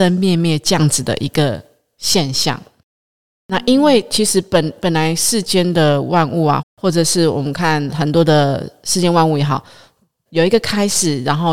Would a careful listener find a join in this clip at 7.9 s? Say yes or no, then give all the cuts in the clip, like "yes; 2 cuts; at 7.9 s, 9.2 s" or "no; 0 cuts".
yes; 3 cuts; at 6.6 s, 7.9 s, 10.3 s